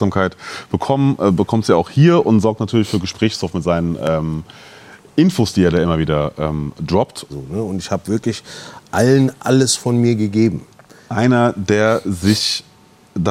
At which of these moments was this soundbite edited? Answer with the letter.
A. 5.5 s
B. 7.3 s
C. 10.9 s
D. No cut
B